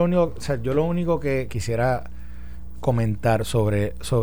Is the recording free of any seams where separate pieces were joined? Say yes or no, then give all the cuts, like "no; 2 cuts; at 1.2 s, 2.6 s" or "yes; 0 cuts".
no; 1 cut; at 1.5 s